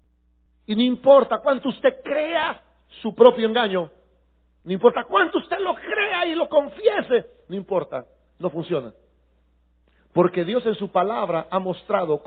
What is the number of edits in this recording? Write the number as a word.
zero